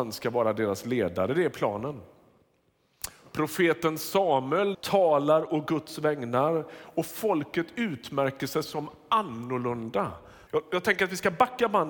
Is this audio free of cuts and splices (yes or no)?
no